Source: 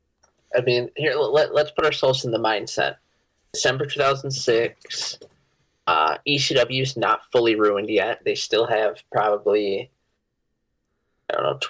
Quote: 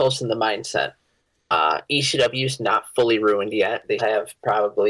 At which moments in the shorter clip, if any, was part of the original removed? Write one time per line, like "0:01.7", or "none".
0:01.3
0:04.0